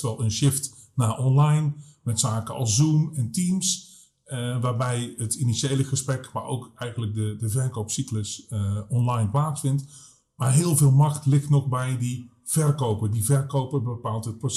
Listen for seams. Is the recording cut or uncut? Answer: uncut